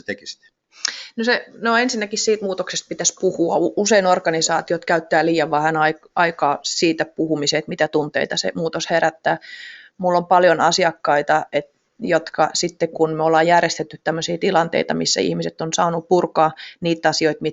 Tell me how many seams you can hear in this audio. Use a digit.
0